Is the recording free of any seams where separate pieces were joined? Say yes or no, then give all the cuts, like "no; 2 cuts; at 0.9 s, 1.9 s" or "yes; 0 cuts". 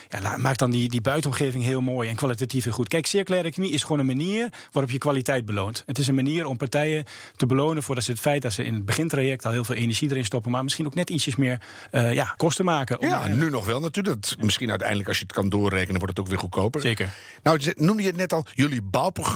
no; 1 cut; at 12.4 s